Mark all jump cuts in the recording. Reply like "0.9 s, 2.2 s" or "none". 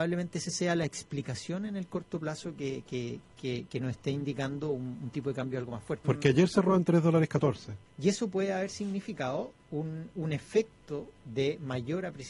6.0 s, 7.9 s, 9.7 s